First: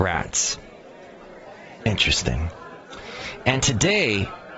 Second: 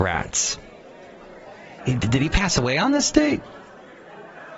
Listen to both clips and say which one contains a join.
second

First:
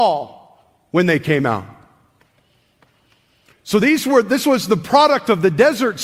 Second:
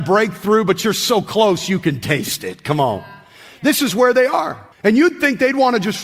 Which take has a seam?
second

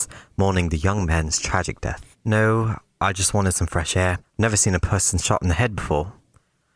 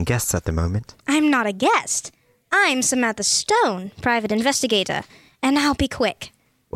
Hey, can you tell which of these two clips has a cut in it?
first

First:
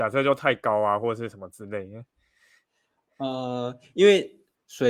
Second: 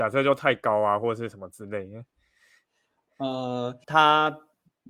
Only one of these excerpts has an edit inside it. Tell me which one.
second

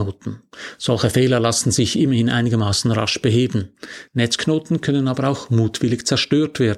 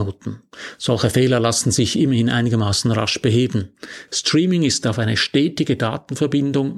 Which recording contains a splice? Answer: second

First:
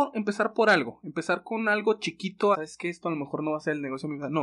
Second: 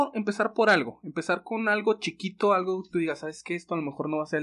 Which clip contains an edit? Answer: first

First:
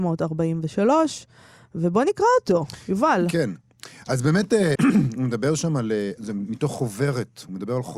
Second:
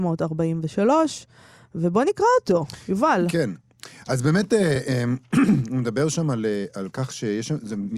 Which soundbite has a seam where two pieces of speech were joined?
first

